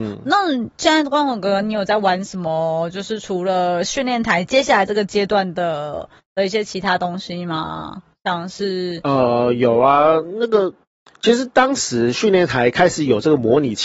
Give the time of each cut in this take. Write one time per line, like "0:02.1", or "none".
none